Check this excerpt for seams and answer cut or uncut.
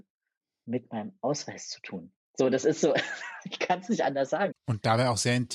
cut